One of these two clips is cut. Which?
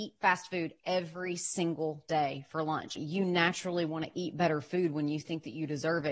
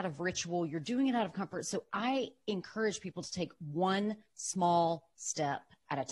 first; 1 cut; at 3.0 s

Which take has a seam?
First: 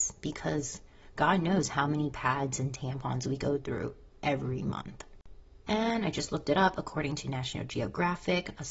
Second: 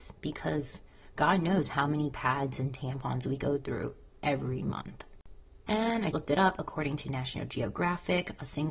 second; 1 cut; at 6.1 s

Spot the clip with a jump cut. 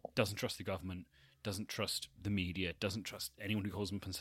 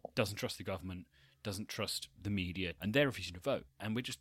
second; 1 cut; at 2.8 s

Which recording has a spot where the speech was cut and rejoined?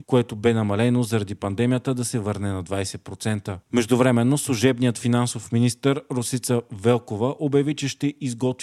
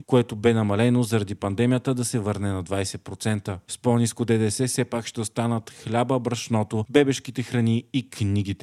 first; 1 cut; at 3.6 s

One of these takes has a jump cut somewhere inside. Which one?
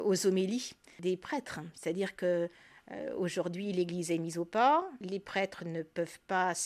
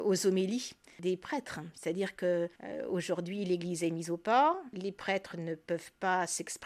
second; 1 cut; at 2.5 s

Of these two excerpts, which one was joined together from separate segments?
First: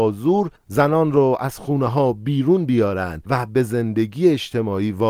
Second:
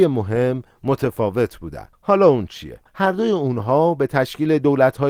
second; 1 cut; at 2.9 s

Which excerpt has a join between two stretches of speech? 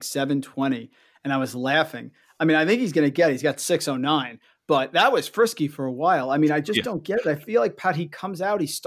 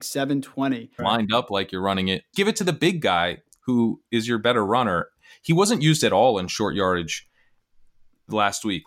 second; 2 cuts; at 1.0 s, 2.3 s

